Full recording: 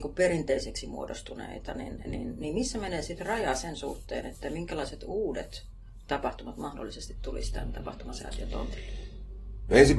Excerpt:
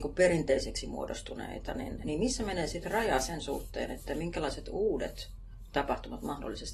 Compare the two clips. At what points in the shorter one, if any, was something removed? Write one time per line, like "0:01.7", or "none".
0:02.0